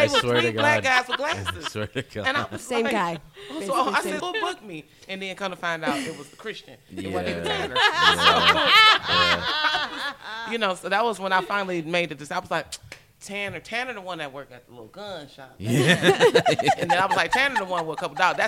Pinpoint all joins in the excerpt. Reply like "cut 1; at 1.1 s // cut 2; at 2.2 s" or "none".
cut 1; at 4.2 s